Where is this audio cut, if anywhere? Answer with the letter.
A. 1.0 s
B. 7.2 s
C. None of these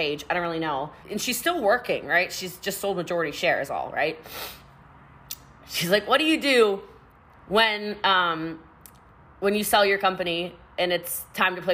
A